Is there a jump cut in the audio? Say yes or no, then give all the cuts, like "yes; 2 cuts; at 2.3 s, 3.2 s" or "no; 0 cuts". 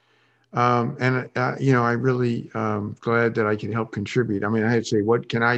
no; 0 cuts